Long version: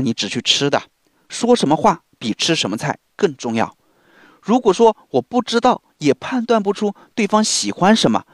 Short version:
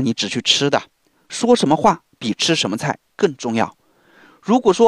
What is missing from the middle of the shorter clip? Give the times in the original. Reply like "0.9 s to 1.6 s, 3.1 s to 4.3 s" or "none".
none